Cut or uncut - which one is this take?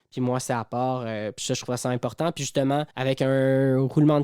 cut